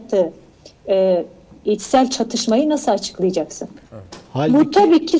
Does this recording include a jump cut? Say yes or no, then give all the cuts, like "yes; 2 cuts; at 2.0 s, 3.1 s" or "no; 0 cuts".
yes; 1 cut; at 3.8 s